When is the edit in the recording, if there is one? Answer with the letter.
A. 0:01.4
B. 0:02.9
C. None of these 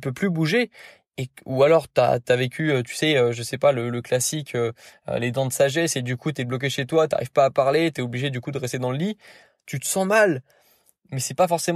C